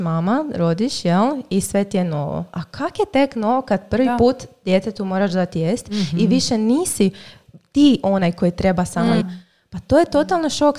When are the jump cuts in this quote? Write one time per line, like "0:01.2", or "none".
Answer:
0:09.2